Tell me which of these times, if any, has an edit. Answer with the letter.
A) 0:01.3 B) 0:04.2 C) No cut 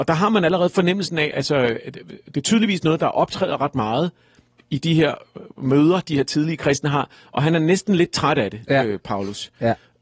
A